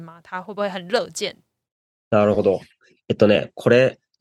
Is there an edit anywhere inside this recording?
no; 0 cuts

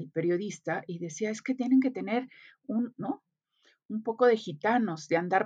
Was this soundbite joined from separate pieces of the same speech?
yes; 1 cut; at 2.9 s

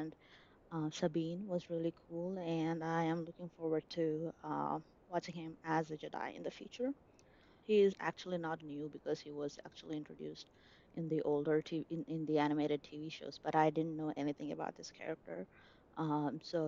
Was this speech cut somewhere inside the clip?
yes; 1 cut; at 7.6 s

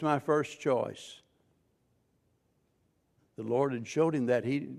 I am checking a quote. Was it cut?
yes; 1 cut; at 3.2 s

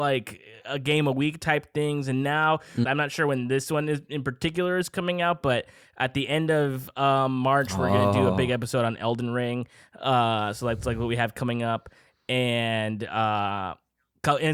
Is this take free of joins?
no; 1 cut; at 2.8 s

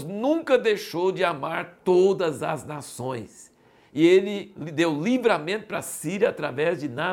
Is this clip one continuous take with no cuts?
yes; 0 cuts

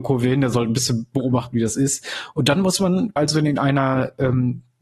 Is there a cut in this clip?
yes; 1 cut; at 3.2 s

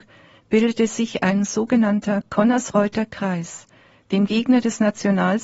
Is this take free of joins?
yes; 0 cuts

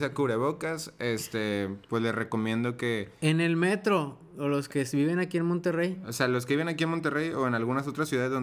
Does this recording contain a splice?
no; 0 cuts

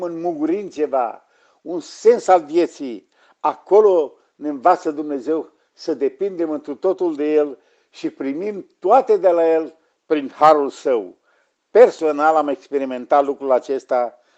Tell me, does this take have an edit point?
no; 0 cuts

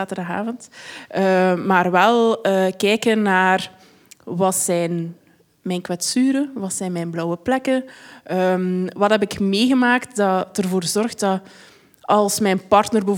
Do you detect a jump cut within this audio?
no; 0 cuts

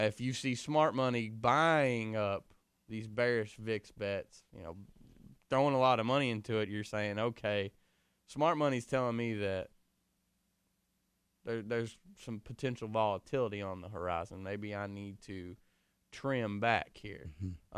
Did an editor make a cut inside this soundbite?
no; 0 cuts

